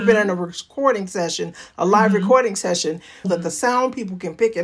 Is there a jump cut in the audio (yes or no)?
yes